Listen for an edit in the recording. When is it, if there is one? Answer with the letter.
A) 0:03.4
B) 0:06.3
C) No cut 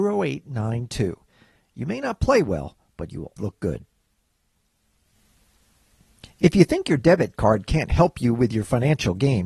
A